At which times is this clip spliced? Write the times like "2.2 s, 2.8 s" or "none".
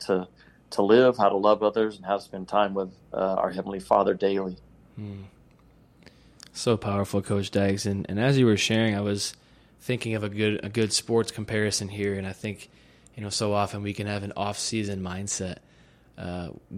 none